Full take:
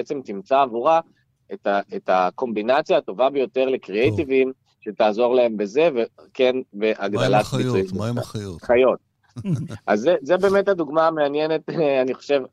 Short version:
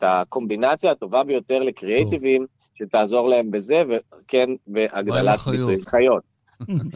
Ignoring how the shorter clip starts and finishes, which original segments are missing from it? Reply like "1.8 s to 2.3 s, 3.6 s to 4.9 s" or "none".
7.9 s to 8.6 s